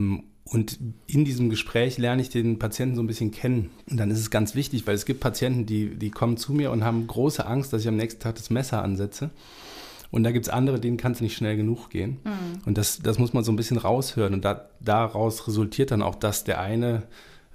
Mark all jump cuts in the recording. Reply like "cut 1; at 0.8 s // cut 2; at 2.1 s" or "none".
cut 1; at 11.2 s